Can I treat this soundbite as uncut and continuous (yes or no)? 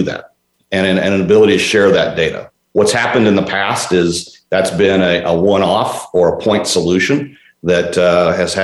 yes